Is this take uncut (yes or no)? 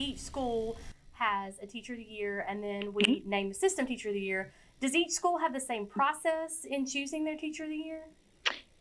yes